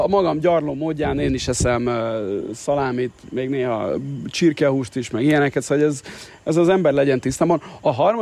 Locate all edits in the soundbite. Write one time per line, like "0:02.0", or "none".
none